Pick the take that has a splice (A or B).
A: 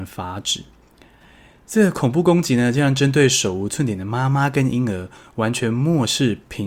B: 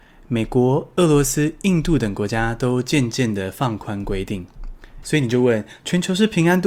B